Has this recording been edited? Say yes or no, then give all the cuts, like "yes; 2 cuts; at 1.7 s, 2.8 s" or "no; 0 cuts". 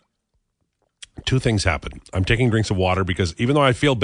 no; 0 cuts